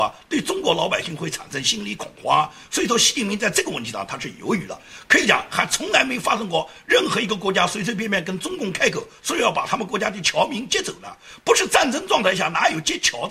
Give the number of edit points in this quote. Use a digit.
1